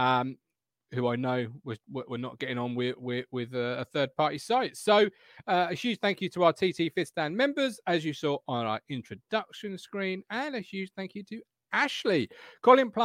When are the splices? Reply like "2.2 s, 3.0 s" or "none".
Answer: none